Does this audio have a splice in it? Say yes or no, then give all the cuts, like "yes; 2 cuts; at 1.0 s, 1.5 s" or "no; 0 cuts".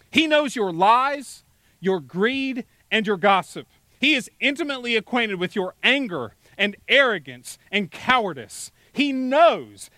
no; 0 cuts